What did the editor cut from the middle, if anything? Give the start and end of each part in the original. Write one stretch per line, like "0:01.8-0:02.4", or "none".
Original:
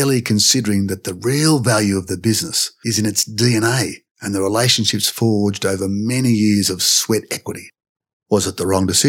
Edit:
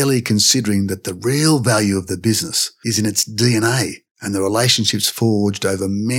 none

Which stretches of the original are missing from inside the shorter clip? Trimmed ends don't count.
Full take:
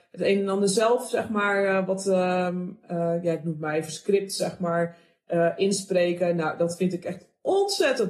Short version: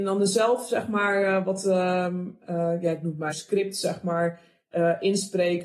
0:03.7-0:03.9

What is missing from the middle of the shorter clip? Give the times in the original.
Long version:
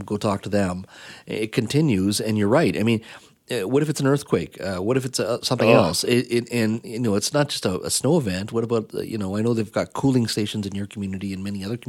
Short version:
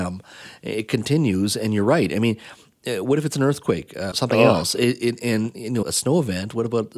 0:04.8-0:05.4
0:07.1-0:07.8

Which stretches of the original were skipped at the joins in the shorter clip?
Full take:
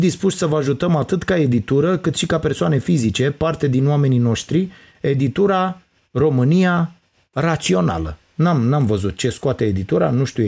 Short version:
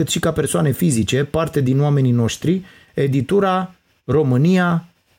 none

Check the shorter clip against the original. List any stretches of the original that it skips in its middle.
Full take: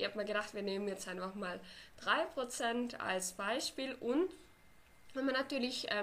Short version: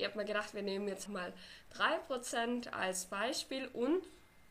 0:01.1-0:01.3

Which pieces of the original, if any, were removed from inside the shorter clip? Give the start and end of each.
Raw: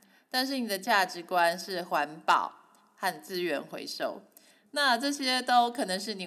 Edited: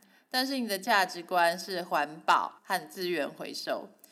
0:02.6-0:02.9

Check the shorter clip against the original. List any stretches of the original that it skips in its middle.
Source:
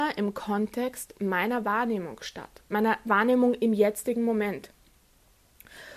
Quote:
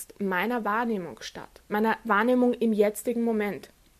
none

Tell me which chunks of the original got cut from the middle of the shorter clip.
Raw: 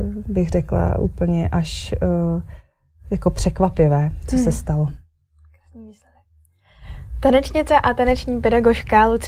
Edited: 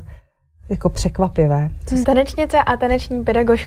0:04.4-0:07.2

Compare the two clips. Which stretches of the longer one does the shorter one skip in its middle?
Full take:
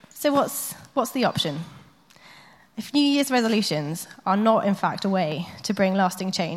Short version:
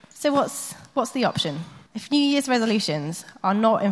0:01.9-0:02.7

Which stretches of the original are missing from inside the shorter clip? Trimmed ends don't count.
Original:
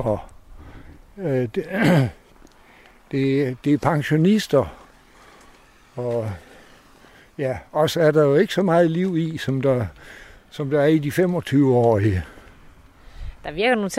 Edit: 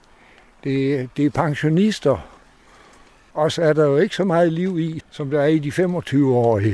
0:05.8-0:07.7
0:09.4-0:10.4

